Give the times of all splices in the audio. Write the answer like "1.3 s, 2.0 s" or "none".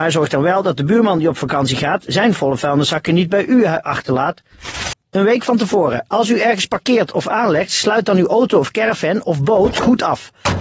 4.9 s